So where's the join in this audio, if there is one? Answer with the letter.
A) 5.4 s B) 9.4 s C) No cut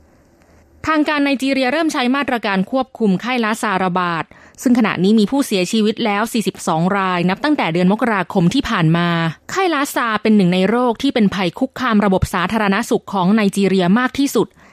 B